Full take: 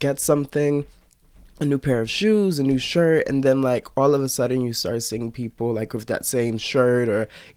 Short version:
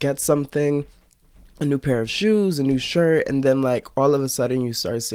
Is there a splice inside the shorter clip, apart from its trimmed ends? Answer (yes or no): no